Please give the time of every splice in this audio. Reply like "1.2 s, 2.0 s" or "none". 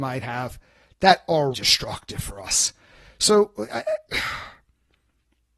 1.5 s